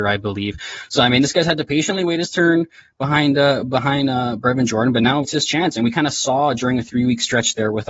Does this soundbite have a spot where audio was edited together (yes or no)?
yes